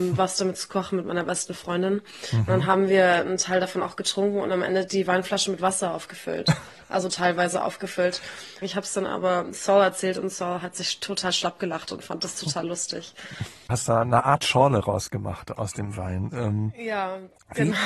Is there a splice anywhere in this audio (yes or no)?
yes